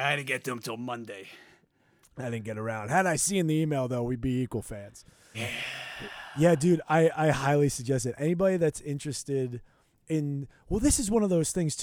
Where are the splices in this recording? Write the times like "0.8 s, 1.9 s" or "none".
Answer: 5.3 s